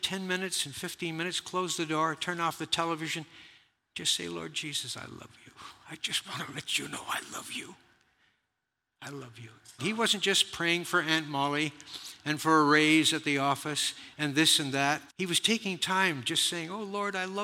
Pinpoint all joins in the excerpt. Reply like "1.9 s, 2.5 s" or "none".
9.8 s, 15.1 s